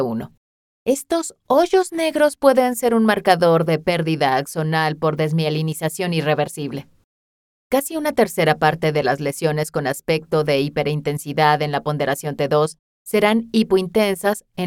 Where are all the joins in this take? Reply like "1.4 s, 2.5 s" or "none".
7.6 s